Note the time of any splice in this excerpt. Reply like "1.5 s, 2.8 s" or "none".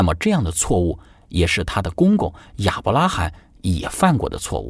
none